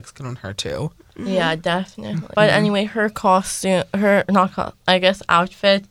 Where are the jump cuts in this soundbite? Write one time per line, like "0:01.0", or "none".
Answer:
0:02.3